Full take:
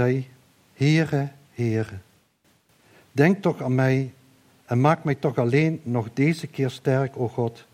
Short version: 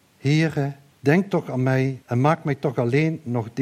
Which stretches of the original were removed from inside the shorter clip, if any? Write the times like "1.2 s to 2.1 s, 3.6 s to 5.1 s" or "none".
1.5 s to 3.0 s, 4.1 s to 4.6 s